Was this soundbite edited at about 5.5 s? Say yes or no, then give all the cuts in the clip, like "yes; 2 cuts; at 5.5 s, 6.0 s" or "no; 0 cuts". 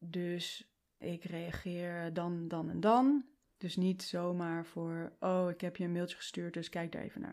no; 1 cut; at 3.4 s